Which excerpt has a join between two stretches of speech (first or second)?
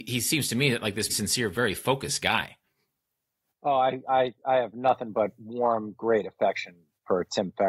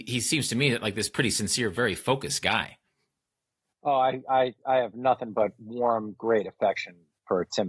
first